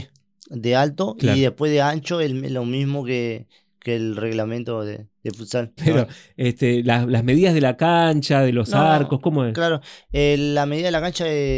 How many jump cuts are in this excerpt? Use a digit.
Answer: 1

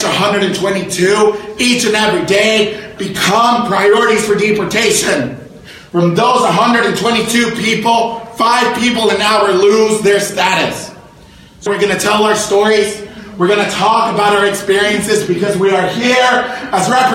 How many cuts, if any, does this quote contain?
1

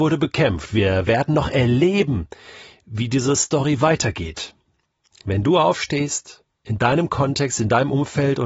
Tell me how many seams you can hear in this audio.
2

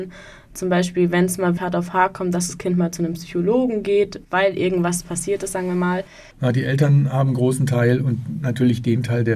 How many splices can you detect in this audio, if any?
2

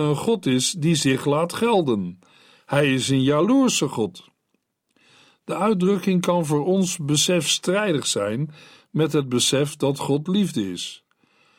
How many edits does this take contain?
0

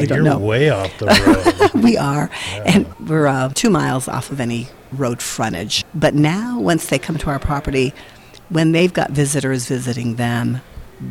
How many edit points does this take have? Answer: 0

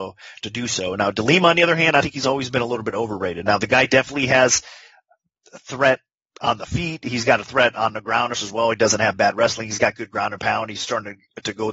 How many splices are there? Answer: 1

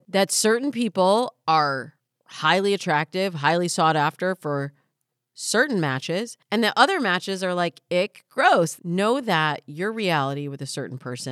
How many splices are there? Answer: 1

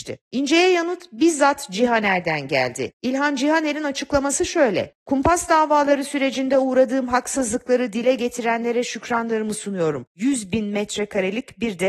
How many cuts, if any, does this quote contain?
1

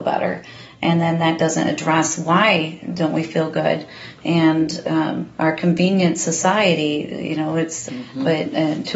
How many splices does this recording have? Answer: 1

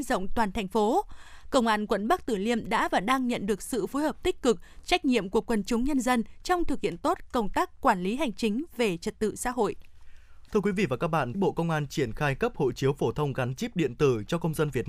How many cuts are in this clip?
2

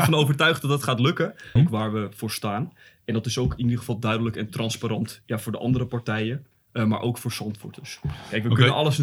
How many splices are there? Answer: 1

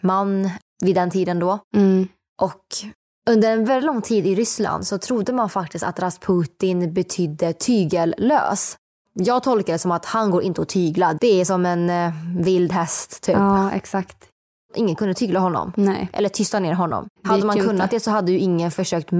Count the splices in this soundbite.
0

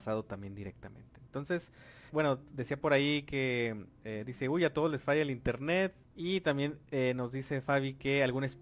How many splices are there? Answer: 2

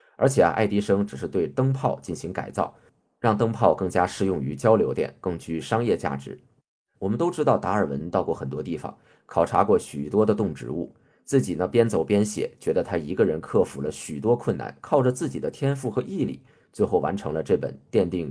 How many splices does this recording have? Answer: 1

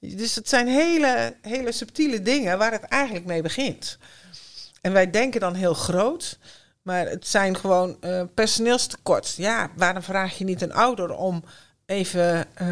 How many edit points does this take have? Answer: 0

